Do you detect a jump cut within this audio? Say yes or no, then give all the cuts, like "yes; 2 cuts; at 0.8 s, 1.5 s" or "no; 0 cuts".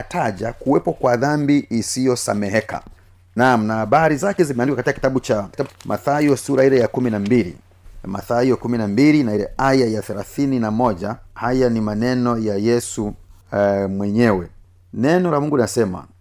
yes; 2 cuts; at 5.7 s, 11.3 s